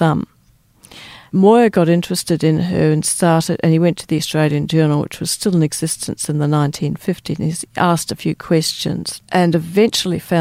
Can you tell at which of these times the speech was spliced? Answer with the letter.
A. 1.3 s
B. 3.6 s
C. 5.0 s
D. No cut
D